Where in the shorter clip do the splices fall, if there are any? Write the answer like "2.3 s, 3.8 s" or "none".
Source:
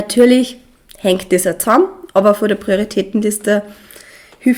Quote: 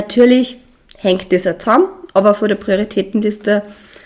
none